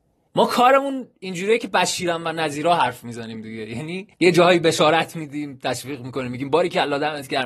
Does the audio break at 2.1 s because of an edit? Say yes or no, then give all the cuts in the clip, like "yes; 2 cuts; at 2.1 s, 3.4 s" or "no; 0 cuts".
no; 1 cut; at 4.1 s